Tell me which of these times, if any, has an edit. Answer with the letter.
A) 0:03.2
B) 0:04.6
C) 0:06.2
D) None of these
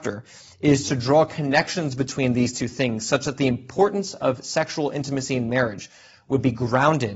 D